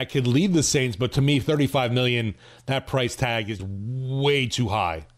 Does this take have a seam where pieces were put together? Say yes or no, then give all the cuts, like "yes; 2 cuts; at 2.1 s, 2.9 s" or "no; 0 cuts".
yes; 1 cut; at 3.6 s